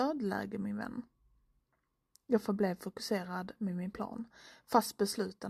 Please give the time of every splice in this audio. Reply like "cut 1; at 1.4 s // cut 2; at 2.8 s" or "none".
none